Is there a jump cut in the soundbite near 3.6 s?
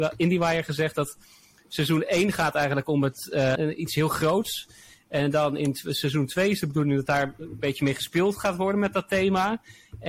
yes; 1 cut; at 3.6 s

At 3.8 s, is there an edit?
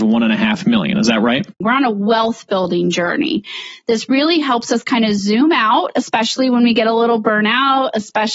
no; 1 cut; at 1.6 s

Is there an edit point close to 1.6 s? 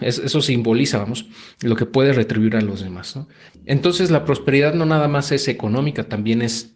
no; 1 cut; at 3.5 s

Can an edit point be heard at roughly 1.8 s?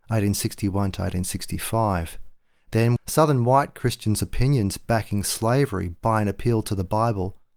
no; 1 cut; at 3.0 s

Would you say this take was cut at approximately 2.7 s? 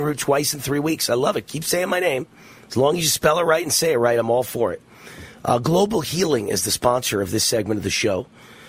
no; 0 cuts

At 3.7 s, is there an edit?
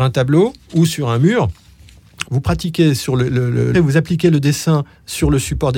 yes; 2 cuts; at 2.2 s, 3.7 s

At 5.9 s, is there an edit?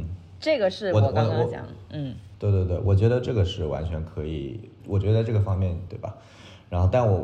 yes; 1 cut; at 5.9 s

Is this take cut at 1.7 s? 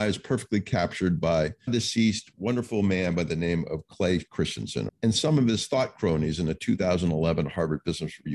yes; 2 cuts; at 1.7 s, 4.9 s

